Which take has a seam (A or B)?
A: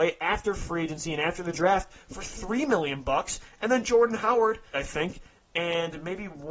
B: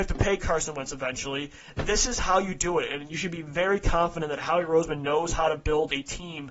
A